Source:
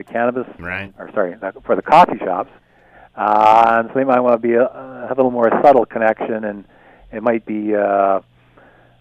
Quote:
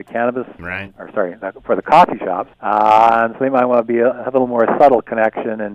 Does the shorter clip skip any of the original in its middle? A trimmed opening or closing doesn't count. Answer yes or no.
yes